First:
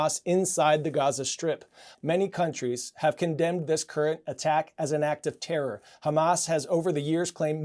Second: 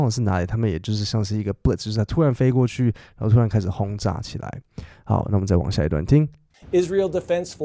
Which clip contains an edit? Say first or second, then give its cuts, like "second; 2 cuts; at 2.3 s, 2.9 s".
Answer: first; 1 cut; at 1.9 s